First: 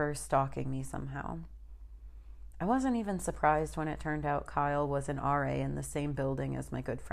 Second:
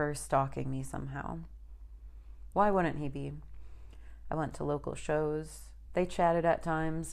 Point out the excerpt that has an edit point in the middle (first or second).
second